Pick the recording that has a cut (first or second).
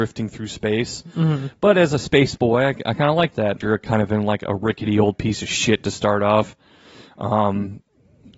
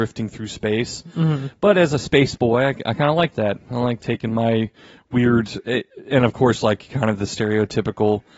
first